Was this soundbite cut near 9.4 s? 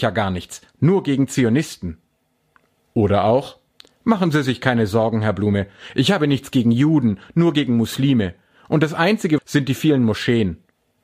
yes; 1 cut; at 9.4 s

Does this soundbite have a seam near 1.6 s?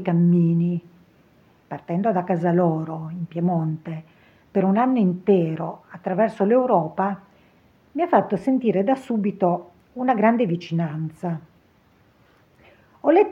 yes; 1 cut; at 1.6 s

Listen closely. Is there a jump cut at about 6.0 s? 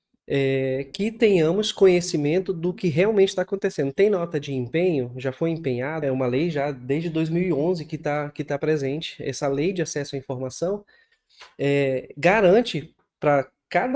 yes; 1 cut; at 6.0 s

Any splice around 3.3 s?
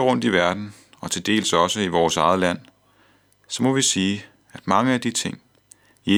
no; 0 cuts

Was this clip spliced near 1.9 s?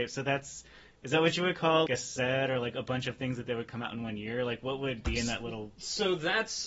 yes; 1 cut; at 1.9 s

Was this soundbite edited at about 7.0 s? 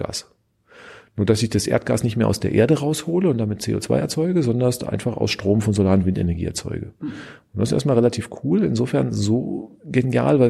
no; 0 cuts

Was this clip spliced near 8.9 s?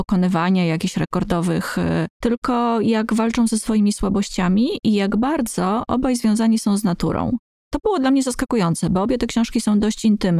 no; 1 cut; at 2.1 s

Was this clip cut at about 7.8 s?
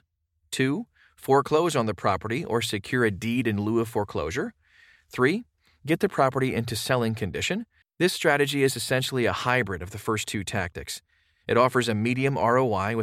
yes; 1 cut; at 7.8 s

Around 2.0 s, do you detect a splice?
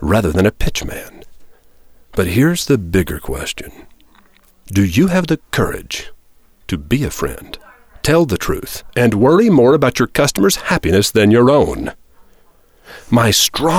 yes; 1 cut; at 2.0 s

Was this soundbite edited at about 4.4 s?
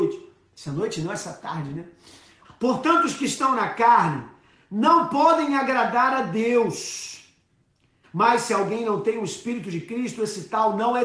no; 2 cuts; at 2.4 s, 8.0 s

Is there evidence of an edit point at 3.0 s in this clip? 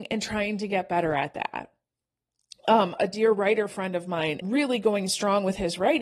yes; 2 cuts; at 3.0 s, 4.4 s

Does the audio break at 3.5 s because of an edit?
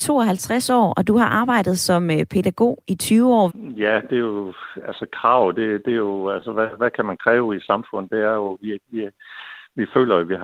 yes; 1 cut; at 3.5 s

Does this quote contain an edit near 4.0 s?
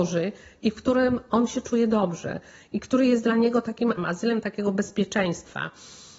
yes; 1 cut; at 4.0 s

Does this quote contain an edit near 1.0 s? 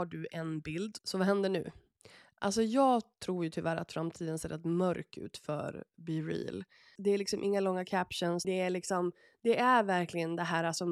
yes; 3 cuts; at 1.0 s, 7.0 s, 8.4 s

